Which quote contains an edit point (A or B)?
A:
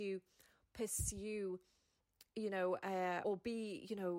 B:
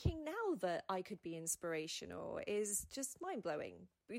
A